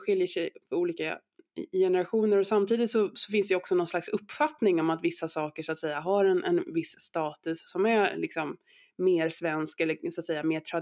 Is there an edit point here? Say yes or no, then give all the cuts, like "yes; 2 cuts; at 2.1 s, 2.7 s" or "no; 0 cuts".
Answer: no; 0 cuts